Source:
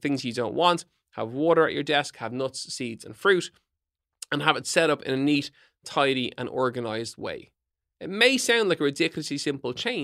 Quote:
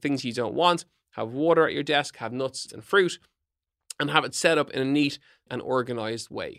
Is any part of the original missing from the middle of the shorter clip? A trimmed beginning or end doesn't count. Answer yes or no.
yes